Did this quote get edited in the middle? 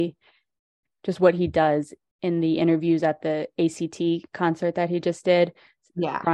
no; 0 cuts

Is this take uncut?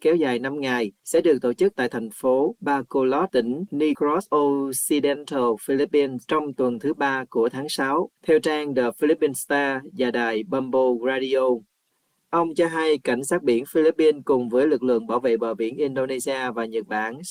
yes; 0 cuts

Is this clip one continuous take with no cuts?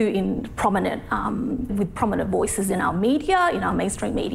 no; 1 cut; at 1.7 s

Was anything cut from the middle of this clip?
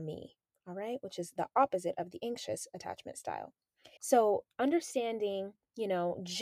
yes; 1 cut; at 4.0 s

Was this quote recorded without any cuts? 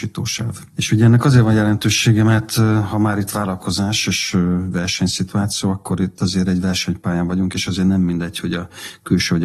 yes; 0 cuts

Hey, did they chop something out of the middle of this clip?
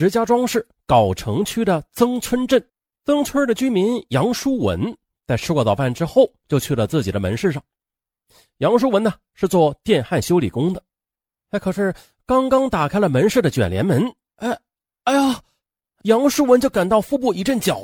yes; 2 cuts; at 3.2 s, 16.0 s

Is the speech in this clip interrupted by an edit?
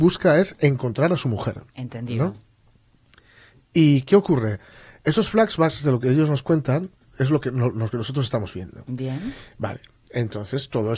no; 0 cuts

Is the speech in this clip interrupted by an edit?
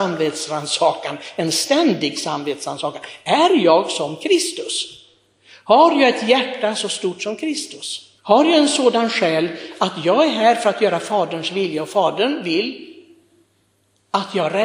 yes; 1 cut; at 8.2 s

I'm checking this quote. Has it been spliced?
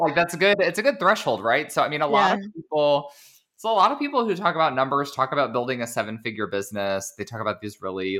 no; 0 cuts

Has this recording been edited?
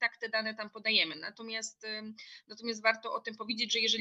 no; 0 cuts

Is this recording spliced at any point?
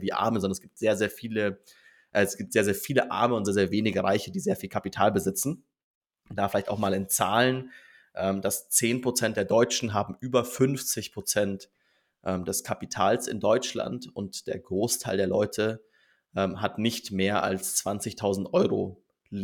no; 0 cuts

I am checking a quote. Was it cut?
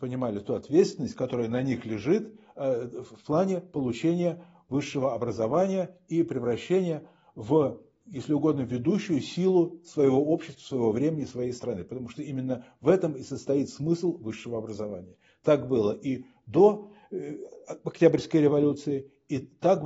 no; 0 cuts

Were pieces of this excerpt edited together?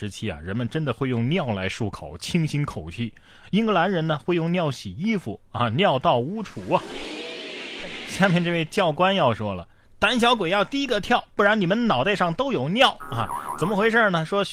no; 0 cuts

